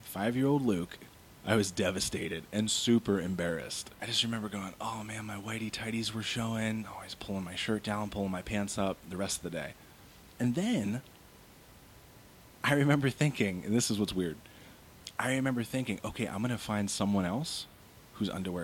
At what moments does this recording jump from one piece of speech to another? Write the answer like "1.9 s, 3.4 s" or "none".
none